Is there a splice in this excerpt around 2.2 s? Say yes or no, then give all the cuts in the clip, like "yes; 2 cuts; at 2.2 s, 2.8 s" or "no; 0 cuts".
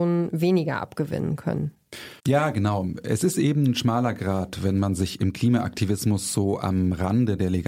yes; 1 cut; at 2.2 s